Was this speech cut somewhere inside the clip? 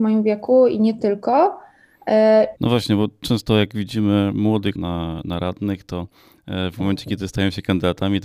yes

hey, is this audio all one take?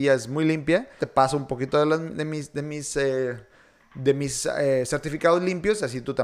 no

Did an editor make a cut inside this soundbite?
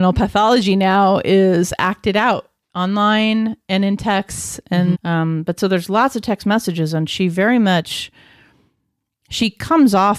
yes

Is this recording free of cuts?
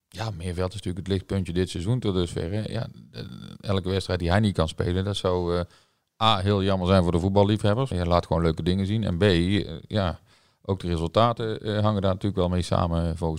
no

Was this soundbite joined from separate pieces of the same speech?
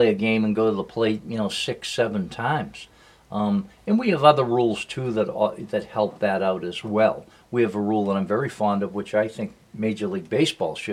no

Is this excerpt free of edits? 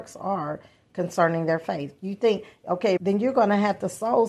no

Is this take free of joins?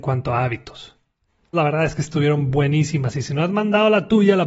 no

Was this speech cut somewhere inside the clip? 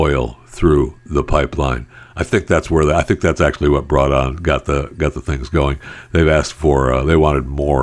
no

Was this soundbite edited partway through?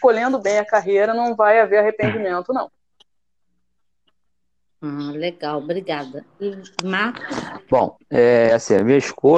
no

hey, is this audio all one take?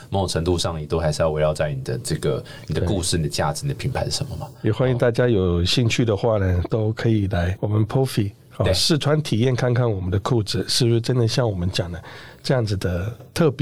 yes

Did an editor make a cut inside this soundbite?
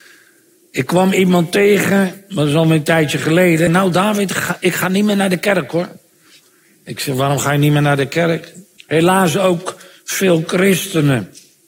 yes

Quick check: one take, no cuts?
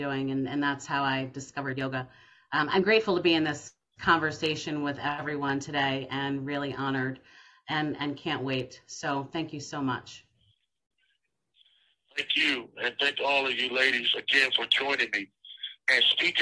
yes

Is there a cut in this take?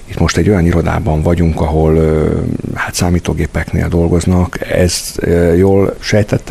no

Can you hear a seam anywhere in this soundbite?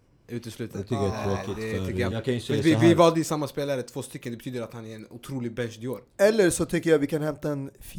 yes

